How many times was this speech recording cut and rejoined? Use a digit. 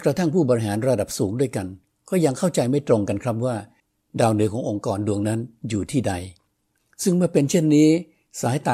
0